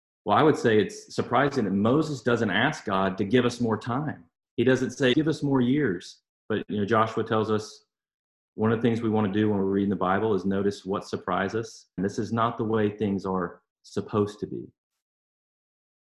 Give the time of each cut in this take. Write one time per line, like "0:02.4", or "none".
0:05.1
0:06.4
0:12.0